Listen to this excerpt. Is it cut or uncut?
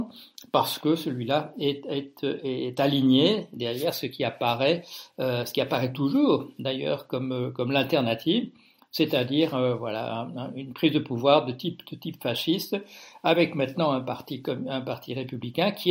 uncut